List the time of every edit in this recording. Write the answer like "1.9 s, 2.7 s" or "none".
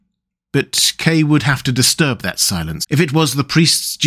2.8 s